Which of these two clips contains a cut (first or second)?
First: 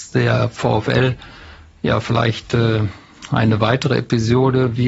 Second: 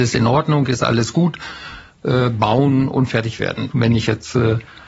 second